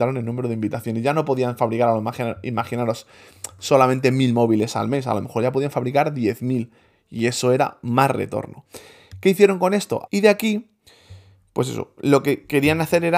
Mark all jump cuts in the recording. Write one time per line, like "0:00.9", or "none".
0:10.1